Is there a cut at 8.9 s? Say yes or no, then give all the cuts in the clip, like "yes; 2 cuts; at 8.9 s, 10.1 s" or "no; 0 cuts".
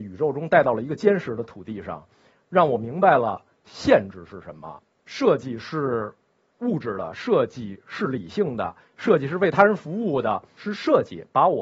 no; 1 cut; at 5.0 s